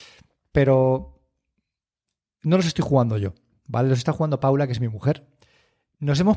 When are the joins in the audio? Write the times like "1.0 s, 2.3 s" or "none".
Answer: none